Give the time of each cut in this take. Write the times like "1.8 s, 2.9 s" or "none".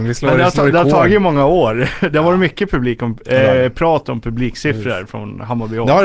none